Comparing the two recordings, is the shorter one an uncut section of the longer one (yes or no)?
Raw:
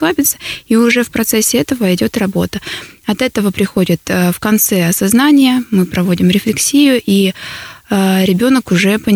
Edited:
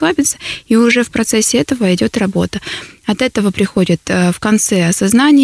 yes